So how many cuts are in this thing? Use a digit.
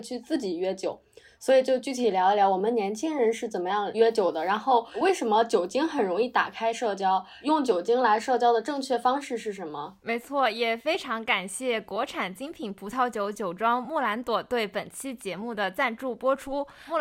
0